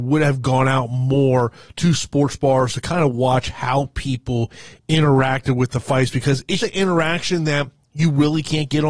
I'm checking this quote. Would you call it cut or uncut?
cut